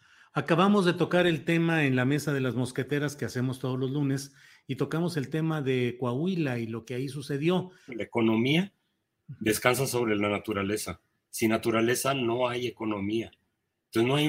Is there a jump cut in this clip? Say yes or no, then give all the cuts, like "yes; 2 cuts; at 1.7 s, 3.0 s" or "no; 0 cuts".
yes; 1 cut; at 7.9 s